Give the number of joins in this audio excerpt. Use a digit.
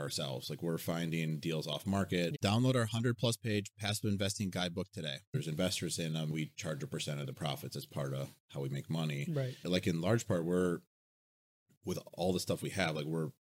2